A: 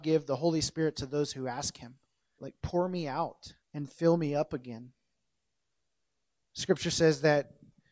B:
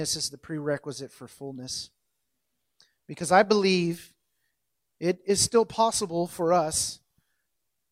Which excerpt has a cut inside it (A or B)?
A